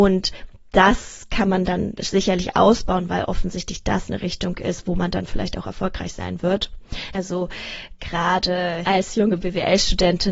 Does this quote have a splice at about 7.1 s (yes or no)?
yes